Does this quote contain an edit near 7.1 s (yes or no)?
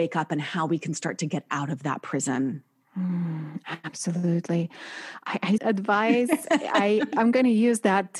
yes